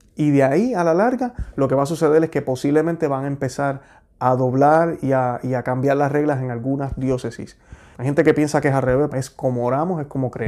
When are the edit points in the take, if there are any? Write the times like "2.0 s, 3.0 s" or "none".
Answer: 7.9 s, 9.1 s